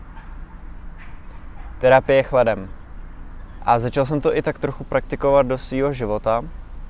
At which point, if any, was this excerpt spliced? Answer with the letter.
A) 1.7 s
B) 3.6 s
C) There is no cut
B